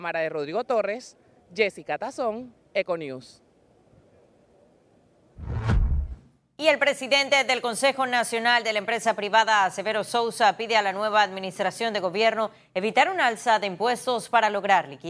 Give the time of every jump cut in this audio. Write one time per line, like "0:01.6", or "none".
none